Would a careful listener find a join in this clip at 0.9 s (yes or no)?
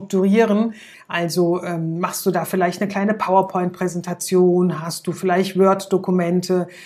yes